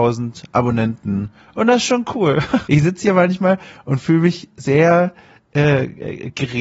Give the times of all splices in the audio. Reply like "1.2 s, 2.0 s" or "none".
2.7 s